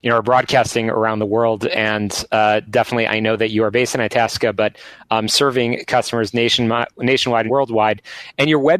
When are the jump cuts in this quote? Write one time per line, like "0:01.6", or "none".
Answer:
0:07.5